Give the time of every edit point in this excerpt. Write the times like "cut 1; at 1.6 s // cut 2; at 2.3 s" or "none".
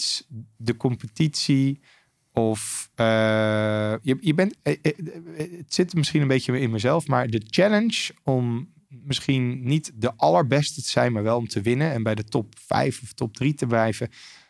none